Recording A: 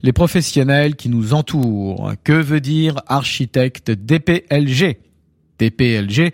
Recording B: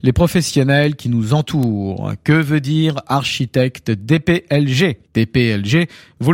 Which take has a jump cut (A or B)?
B